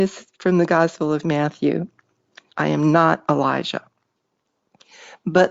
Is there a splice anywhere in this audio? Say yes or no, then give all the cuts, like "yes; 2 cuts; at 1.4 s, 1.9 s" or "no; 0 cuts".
yes; 1 cut; at 2.5 s